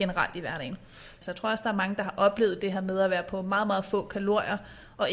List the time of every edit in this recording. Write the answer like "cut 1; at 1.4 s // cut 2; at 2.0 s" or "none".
cut 1; at 1.2 s